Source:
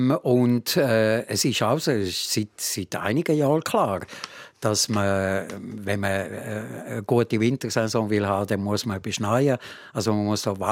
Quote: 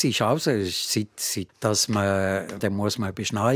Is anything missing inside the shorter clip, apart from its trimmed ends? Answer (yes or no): yes